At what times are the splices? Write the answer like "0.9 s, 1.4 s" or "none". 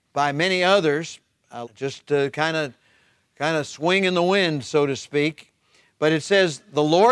1.6 s